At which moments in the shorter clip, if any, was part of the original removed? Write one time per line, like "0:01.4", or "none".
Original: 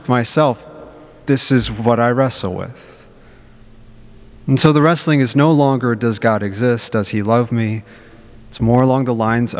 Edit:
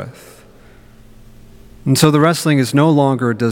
none